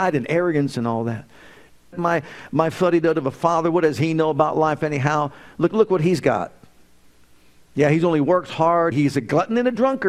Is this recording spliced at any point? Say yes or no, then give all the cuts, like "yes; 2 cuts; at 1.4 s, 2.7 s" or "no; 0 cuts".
yes; 2 cuts; at 1.9 s, 8.9 s